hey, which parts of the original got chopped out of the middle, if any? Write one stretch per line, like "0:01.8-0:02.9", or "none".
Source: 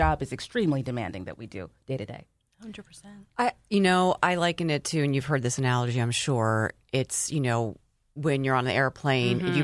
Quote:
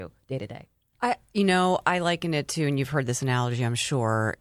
0:02.5-0:03.3